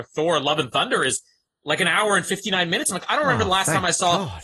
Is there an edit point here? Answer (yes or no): no